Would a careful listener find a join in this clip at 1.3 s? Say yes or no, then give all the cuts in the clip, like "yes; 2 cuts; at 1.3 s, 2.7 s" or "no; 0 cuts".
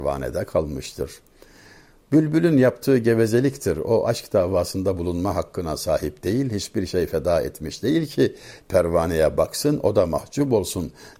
no; 1 cut; at 8.6 s